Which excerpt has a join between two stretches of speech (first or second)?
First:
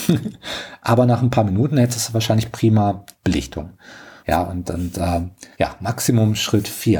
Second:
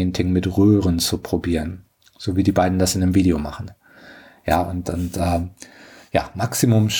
first